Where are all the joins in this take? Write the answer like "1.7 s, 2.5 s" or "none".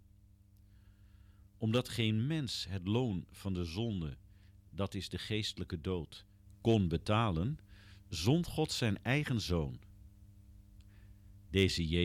none